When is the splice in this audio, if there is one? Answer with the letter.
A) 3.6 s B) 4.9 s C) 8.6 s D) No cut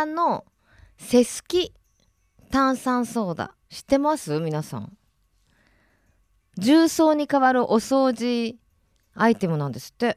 A